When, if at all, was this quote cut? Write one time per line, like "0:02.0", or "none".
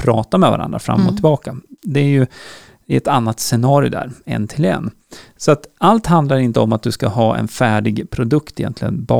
none